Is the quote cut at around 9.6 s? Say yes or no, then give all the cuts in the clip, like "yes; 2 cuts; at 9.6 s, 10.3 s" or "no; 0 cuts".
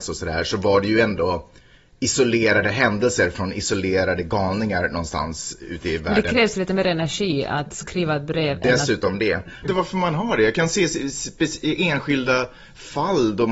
yes; 1 cut; at 9.6 s